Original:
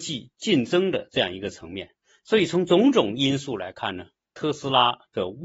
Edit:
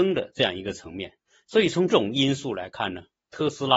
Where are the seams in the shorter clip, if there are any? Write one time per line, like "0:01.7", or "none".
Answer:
0:01.9